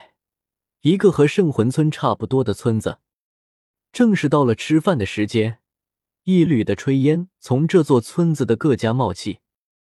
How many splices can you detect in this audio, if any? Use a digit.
1